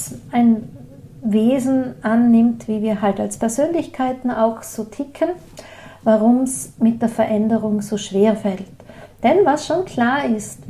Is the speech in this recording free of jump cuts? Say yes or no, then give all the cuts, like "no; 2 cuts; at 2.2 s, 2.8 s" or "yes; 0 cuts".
yes; 0 cuts